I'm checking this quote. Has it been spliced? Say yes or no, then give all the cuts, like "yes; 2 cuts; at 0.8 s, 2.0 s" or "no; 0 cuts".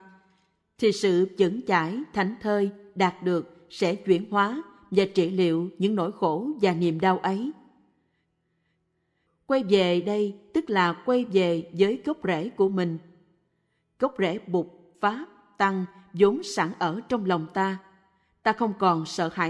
yes; 1 cut; at 9.3 s